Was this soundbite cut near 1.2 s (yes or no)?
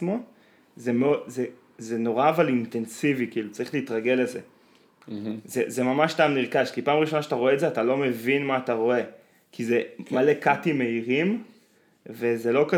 no